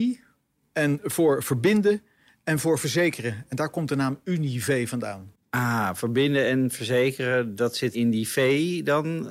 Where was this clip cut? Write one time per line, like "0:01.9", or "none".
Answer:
0:07.9